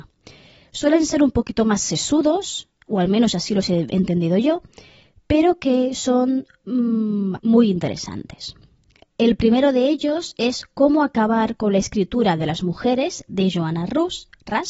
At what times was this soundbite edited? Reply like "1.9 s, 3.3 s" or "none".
7.4 s